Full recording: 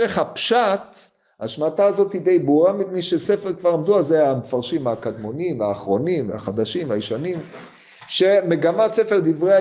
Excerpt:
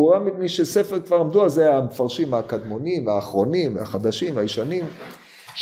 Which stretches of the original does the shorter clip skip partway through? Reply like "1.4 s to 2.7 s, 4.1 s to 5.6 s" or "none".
none